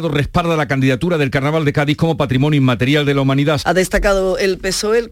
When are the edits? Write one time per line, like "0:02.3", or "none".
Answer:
0:03.6